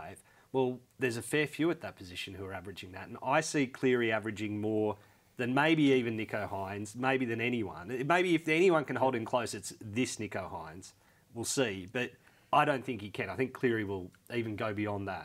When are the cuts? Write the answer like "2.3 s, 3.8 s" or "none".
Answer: none